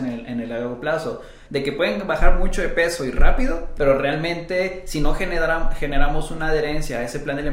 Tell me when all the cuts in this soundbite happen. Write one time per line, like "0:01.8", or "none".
0:01.5
0:03.8